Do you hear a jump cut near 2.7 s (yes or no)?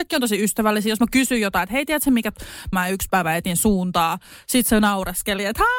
yes